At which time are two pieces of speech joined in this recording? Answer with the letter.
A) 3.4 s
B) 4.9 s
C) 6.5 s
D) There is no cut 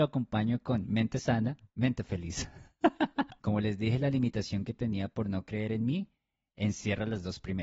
A